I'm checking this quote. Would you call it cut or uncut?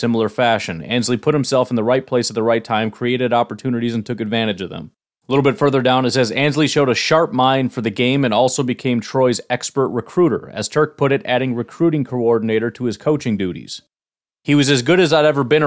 uncut